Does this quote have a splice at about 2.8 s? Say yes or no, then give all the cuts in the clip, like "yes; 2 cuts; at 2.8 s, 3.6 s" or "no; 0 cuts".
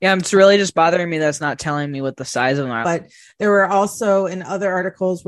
yes; 1 cut; at 2.8 s